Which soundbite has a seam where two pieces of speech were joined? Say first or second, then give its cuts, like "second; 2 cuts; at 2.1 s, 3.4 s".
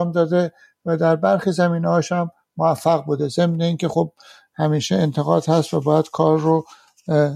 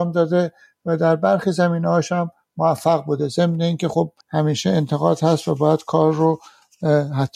second; 1 cut; at 4.2 s